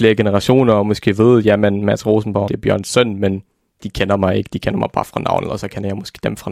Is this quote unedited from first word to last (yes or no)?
no